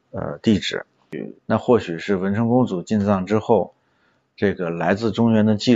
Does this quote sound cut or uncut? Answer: cut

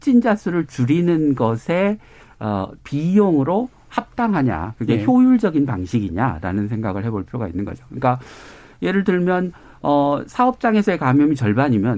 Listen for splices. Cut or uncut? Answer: uncut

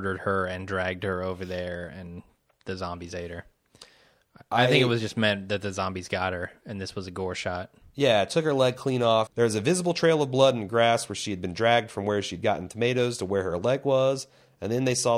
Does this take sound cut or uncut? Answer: cut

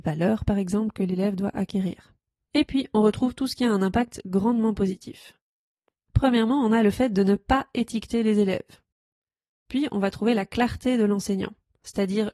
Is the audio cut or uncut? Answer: cut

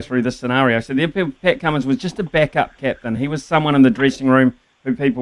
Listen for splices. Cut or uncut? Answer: uncut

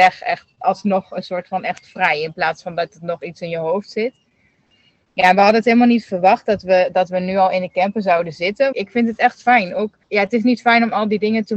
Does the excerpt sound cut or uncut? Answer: cut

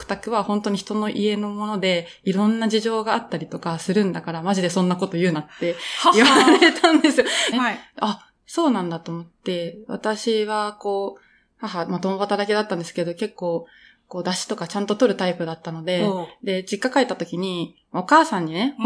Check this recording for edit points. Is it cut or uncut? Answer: cut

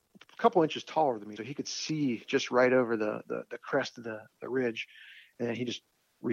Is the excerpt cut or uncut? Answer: cut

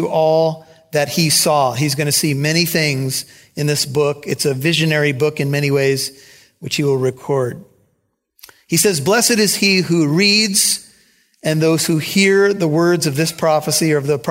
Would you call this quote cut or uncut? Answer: uncut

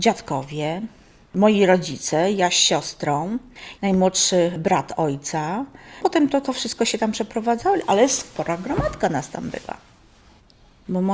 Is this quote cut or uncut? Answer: cut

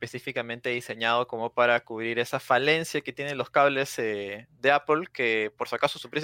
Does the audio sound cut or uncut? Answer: uncut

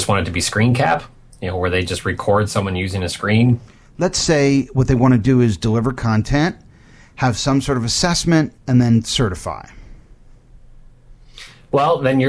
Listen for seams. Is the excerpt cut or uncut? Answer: uncut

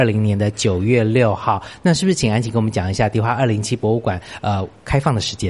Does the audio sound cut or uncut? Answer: uncut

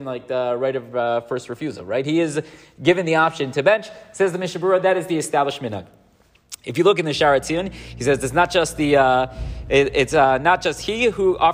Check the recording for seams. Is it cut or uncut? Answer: uncut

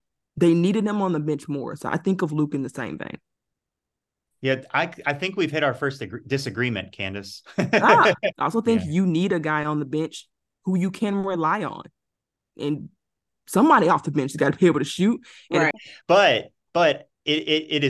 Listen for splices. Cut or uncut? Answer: cut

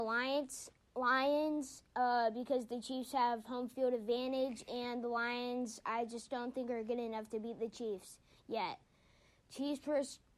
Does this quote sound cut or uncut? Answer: uncut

